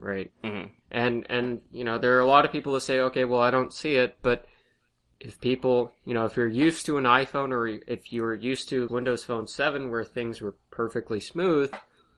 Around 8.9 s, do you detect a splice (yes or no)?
yes